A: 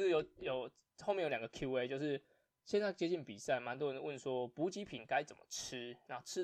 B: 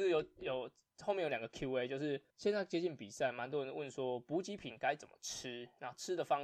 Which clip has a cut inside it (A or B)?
B